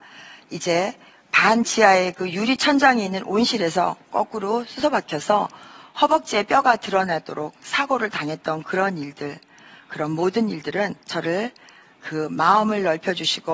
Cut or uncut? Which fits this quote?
cut